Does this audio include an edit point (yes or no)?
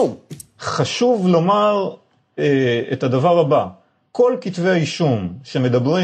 no